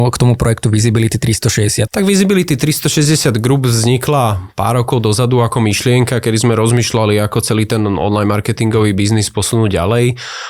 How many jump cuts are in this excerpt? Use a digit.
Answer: 1